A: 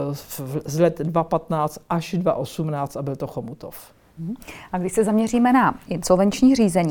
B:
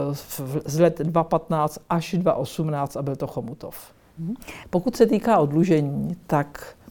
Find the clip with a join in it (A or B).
B